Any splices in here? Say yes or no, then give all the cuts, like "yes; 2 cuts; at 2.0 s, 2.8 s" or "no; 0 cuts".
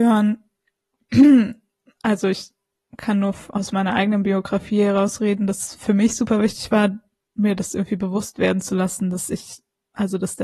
no; 0 cuts